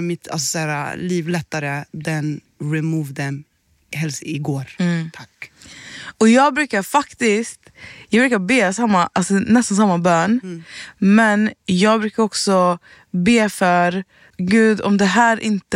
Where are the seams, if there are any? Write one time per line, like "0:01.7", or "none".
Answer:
none